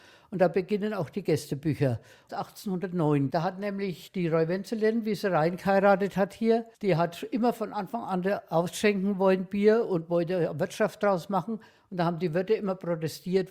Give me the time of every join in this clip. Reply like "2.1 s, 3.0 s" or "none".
6.7 s